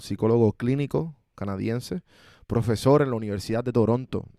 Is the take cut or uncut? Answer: uncut